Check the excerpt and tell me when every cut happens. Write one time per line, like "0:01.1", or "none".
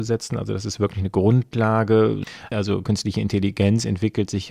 0:02.5